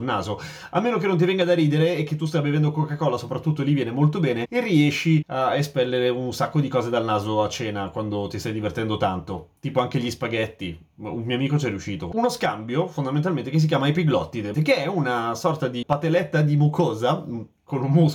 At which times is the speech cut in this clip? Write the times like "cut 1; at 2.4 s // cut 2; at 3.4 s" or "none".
cut 1; at 12.1 s // cut 2; at 14.5 s